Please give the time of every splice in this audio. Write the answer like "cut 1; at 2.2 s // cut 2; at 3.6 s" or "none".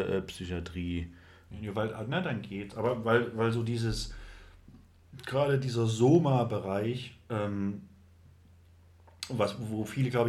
cut 1; at 1.5 s